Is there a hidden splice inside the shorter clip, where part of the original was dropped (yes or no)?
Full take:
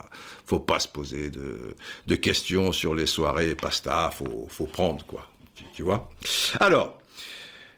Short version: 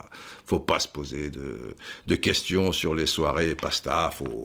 no